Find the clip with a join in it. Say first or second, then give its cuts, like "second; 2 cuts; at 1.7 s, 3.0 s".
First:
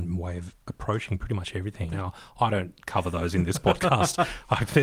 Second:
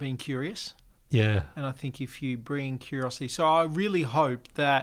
first; 1 cut; at 1.9 s